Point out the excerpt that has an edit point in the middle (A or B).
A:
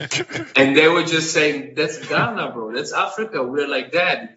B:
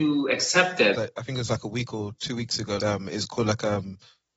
B